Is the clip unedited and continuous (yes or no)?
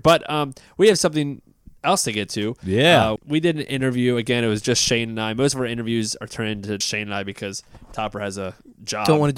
no